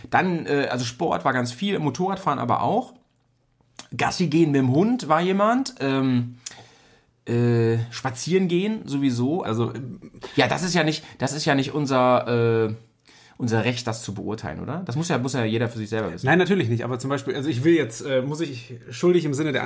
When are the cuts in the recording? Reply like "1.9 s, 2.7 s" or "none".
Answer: 9.4 s